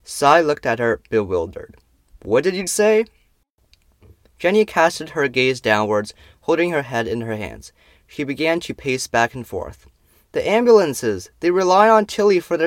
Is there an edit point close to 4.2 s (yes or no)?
no